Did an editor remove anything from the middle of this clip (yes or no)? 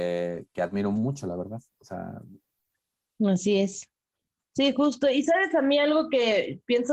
no